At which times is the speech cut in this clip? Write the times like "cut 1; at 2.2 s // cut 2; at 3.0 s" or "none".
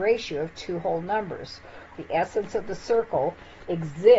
cut 1; at 1.9 s